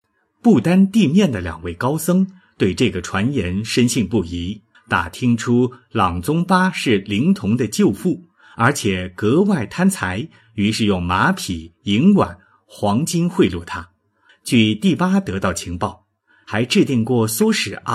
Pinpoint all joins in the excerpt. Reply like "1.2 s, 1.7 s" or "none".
4.7 s, 14.3 s, 16.4 s